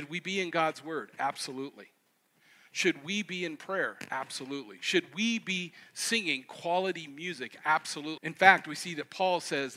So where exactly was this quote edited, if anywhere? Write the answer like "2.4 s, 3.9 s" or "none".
8.2 s